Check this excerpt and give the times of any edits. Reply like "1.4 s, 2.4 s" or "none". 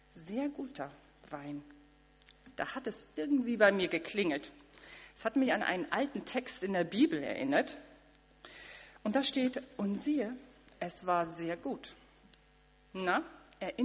none